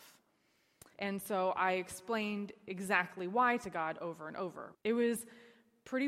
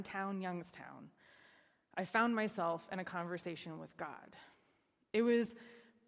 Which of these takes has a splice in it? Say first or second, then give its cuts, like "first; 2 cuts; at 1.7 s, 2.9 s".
first; 2 cuts; at 0.9 s, 4.7 s